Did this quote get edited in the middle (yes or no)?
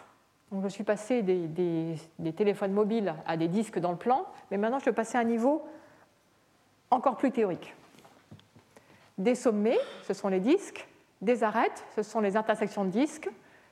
no